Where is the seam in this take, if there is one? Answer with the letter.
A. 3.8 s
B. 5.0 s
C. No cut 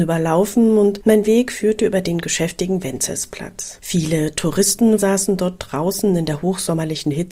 B